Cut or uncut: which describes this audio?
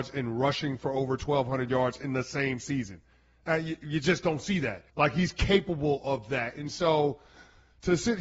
cut